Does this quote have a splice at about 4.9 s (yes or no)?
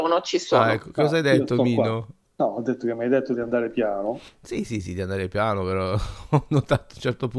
no